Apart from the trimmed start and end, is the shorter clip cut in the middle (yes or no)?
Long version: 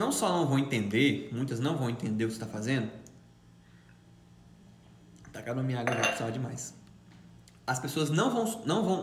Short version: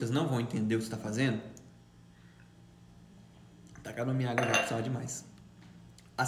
no